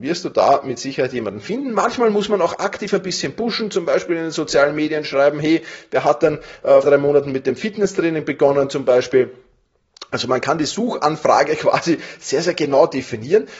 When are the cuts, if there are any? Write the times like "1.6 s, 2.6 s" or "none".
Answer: 6.8 s